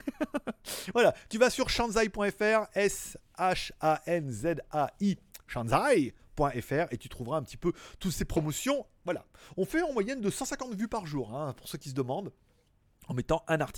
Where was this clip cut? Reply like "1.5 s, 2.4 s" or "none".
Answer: none